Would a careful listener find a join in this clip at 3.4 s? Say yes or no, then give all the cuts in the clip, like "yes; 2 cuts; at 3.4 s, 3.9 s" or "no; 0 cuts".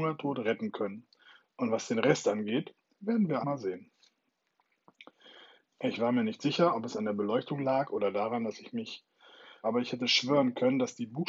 yes; 3 cuts; at 3.4 s, 5.7 s, 9.6 s